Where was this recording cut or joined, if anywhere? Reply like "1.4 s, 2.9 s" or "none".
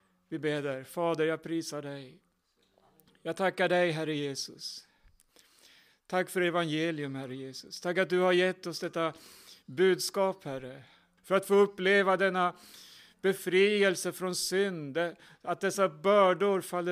11.2 s

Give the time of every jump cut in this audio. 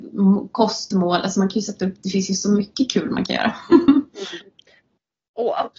none

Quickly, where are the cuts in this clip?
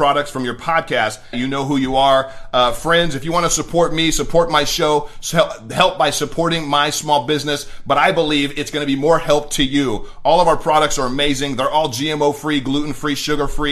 1.3 s

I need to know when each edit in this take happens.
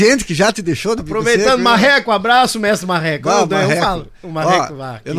none

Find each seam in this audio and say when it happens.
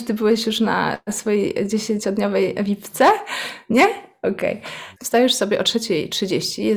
4.9 s

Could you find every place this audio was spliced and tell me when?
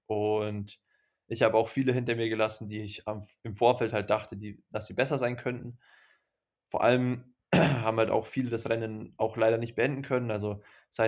none

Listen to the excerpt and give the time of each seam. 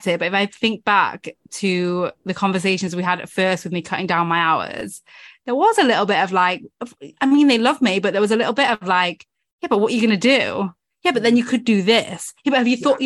none

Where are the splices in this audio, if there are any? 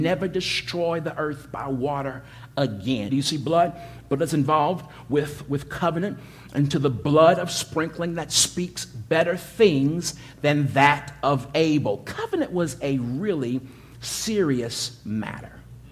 3.1 s

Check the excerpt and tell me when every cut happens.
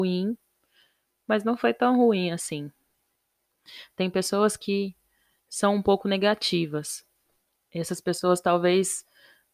none

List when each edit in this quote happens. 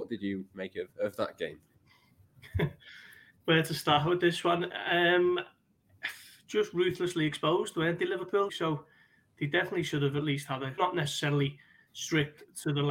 8.5 s, 10.8 s

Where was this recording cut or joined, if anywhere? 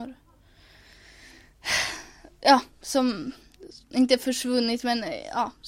3.9 s

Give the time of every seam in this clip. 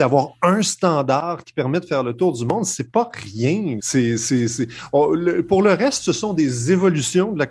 3.8 s

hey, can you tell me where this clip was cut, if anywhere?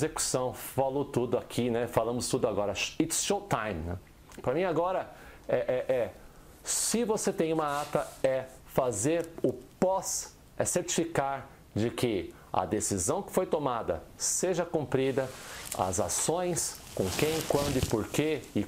none

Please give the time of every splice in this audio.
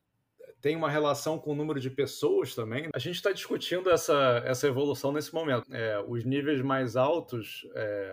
2.9 s, 5.6 s

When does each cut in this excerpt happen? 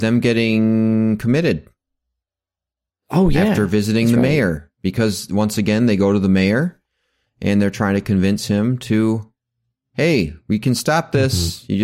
none

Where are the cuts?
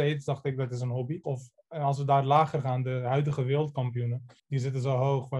1.2 s

